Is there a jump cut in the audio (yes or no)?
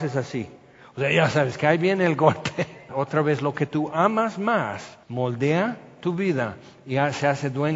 yes